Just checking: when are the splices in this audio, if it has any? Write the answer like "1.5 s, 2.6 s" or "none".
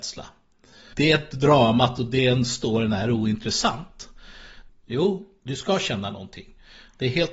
0.9 s, 4.7 s